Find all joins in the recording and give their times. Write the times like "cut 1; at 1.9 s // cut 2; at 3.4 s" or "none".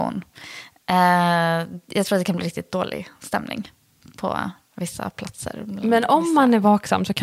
none